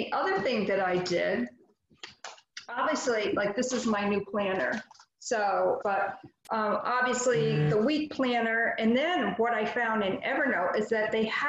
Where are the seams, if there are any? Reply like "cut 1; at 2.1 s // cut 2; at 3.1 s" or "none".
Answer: cut 1; at 5.8 s